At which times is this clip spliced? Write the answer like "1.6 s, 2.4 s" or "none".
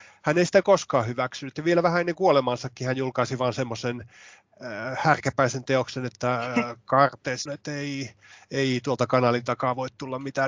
7.5 s

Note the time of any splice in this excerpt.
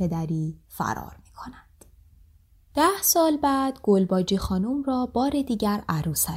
none

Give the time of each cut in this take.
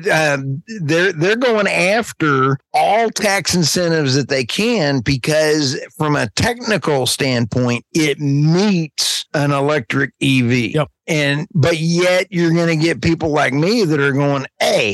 none

